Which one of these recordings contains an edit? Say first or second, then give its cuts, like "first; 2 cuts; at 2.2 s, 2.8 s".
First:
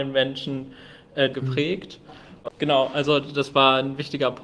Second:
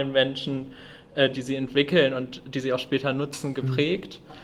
first; 2 cuts; at 1.3 s, 2.5 s